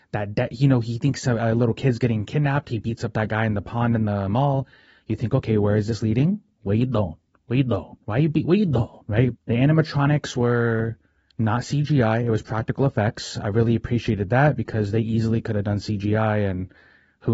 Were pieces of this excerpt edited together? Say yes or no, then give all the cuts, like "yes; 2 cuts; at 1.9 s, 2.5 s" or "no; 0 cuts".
yes; 1 cut; at 9.4 s